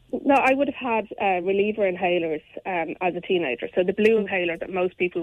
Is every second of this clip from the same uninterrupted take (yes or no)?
yes